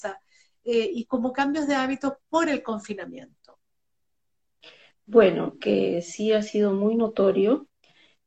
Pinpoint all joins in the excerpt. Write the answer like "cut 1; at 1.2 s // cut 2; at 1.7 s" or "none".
cut 1; at 5.6 s